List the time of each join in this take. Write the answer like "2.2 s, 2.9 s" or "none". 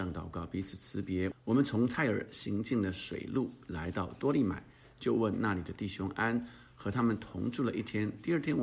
1.3 s